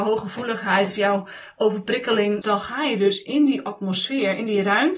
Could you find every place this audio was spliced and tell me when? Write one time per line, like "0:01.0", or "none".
0:02.4

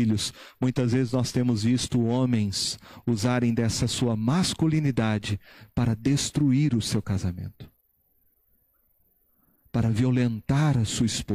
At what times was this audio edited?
none

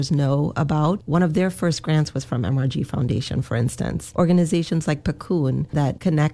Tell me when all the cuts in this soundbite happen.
none

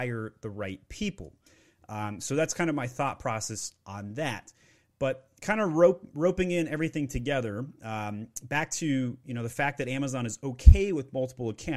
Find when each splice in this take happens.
none

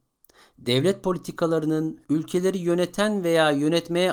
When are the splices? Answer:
0:02.0

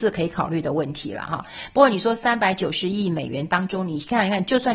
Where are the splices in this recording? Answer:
none

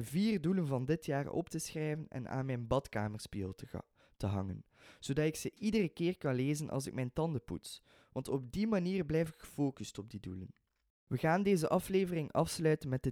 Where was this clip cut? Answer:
none

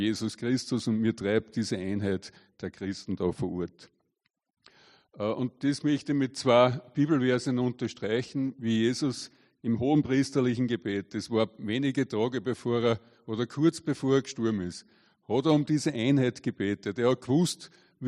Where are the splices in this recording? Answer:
none

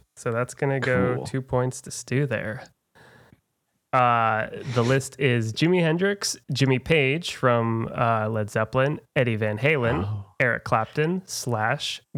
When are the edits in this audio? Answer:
none

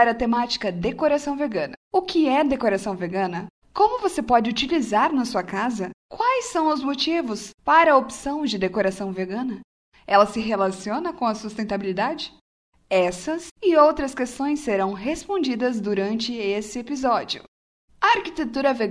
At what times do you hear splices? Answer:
none

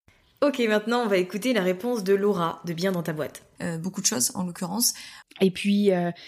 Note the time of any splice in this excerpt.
0:03.6
0:05.2

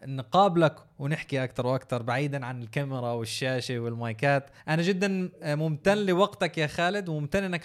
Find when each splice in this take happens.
0:04.6

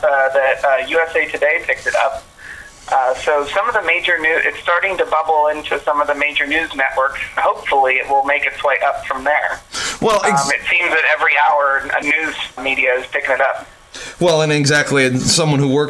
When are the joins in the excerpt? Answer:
none

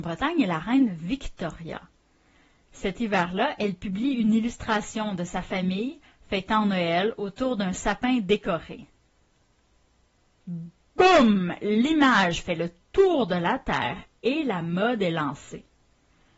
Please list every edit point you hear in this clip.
none

